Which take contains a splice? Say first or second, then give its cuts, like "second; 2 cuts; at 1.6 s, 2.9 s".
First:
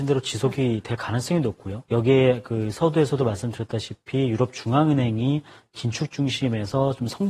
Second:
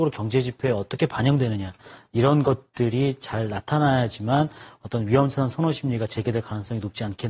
first; 1 cut; at 1.8 s